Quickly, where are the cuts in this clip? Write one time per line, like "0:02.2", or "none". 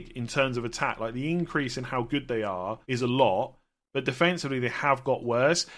0:02.8